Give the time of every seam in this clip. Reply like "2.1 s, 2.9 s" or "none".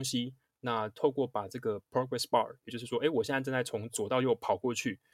none